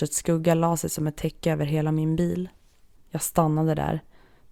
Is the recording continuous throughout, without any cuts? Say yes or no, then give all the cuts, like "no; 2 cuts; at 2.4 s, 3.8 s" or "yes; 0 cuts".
no; 1 cut; at 3.0 s